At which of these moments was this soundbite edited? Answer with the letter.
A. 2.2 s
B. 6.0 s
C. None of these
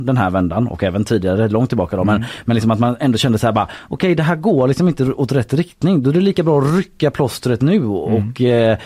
C